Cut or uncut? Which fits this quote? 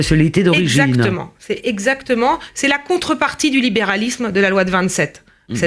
uncut